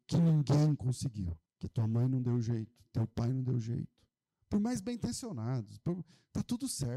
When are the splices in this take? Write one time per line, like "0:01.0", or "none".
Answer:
0:01.4